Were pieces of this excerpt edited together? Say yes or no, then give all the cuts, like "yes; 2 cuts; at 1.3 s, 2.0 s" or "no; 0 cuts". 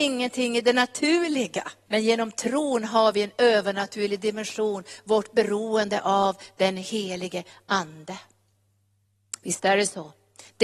yes; 1 cut; at 1.9 s